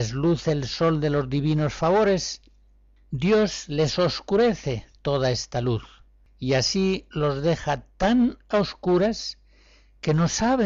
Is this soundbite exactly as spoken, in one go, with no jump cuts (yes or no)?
yes